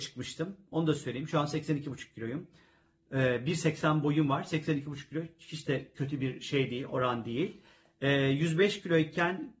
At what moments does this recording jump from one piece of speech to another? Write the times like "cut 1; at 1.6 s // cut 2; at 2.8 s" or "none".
none